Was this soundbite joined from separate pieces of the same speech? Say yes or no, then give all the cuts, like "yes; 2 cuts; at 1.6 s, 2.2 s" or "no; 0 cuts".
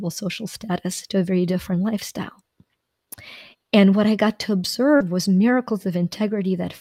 yes; 1 cut; at 3.5 s